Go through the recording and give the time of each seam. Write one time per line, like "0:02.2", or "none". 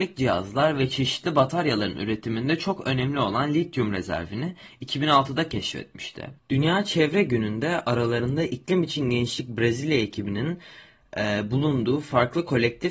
0:06.4